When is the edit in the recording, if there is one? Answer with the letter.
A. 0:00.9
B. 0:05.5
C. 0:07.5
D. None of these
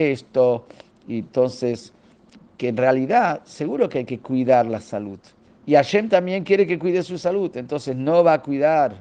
B